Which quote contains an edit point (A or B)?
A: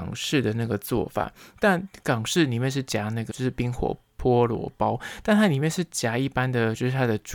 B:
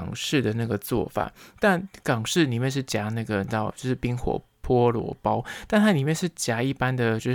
A